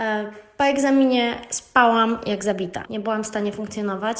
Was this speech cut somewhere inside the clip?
yes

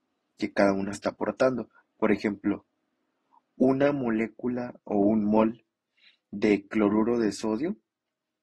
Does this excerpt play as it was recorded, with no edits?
yes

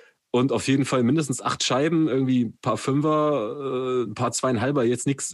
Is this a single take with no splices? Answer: yes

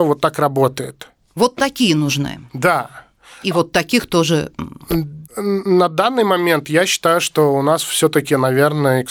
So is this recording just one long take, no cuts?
yes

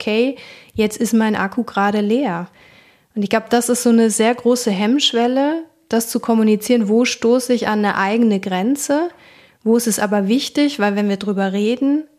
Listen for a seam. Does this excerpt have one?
no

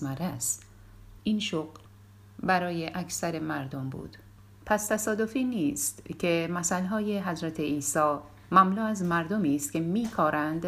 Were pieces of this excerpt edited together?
yes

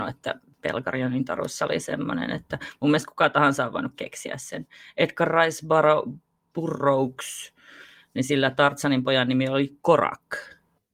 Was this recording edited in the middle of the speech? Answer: no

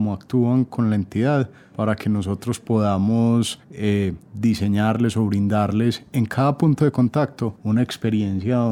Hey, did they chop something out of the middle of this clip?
no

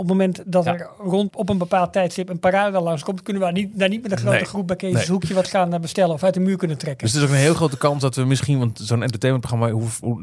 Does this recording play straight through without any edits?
no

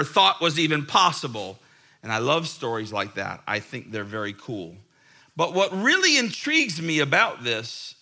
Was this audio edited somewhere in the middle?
no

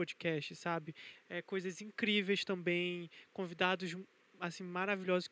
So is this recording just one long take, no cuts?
no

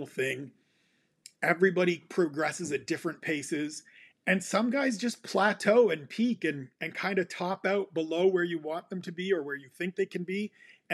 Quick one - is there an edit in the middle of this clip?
no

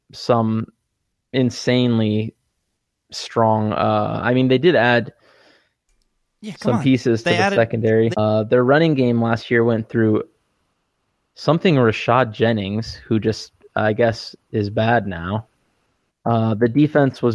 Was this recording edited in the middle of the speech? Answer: yes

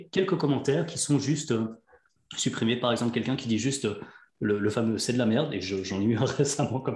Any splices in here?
no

